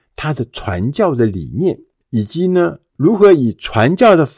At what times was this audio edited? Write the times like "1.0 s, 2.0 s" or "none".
2.9 s